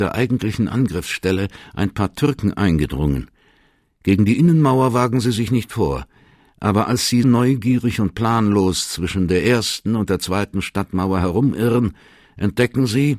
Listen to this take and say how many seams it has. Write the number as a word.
one